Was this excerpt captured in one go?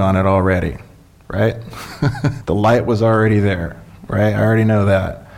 no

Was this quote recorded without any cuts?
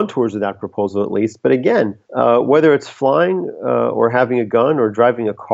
no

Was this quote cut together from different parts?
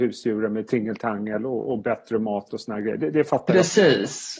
no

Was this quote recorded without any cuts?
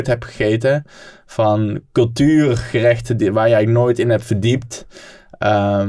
yes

